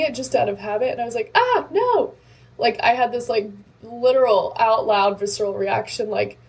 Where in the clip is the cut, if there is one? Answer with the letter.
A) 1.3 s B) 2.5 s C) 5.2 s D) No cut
D